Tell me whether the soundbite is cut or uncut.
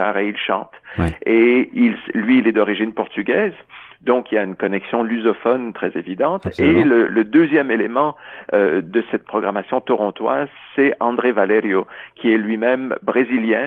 cut